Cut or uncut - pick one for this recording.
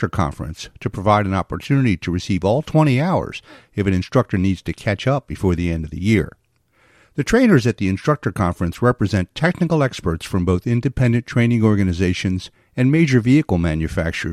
uncut